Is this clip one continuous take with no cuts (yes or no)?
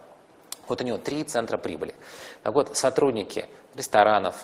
yes